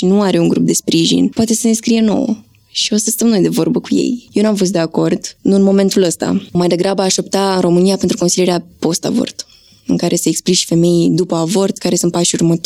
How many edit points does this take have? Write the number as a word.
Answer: one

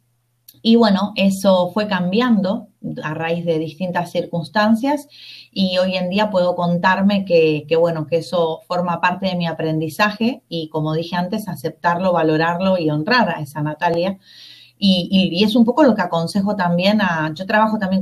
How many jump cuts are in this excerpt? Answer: zero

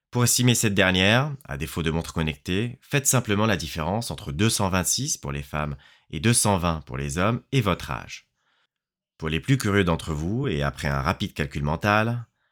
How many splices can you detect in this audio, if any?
zero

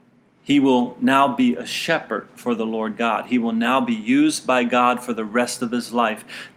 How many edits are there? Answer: zero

